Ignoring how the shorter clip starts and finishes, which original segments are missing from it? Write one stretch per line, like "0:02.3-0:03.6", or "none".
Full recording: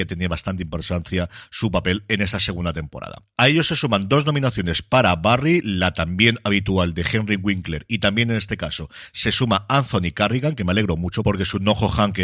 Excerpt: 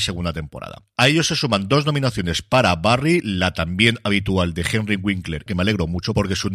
0:07.9-0:10.6